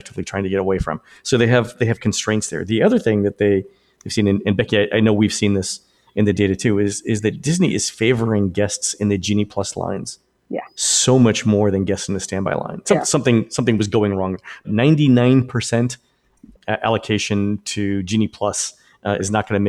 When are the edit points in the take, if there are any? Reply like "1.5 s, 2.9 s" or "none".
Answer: 12.8 s, 14.6 s